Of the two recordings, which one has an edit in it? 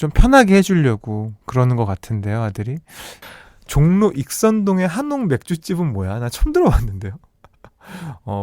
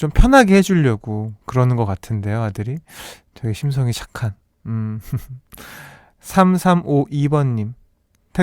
first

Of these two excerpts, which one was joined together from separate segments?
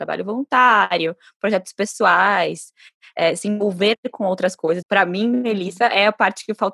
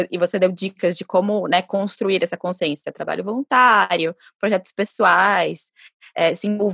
first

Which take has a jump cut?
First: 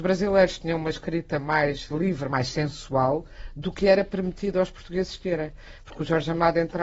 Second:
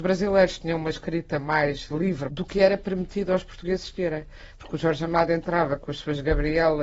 second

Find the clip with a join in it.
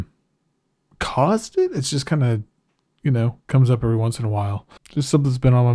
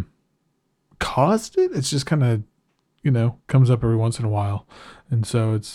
first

